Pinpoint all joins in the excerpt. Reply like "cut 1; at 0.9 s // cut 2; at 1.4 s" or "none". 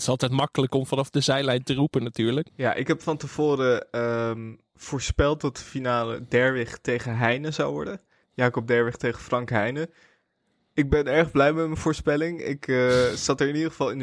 cut 1; at 2.5 s